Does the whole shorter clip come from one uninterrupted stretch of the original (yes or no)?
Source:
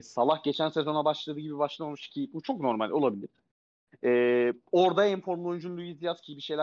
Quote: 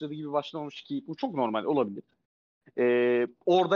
yes